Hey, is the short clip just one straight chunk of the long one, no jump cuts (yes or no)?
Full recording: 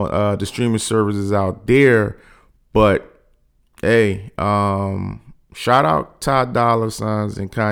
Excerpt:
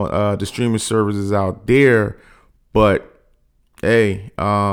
yes